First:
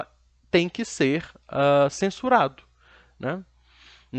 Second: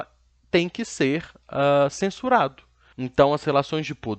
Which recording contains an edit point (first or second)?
second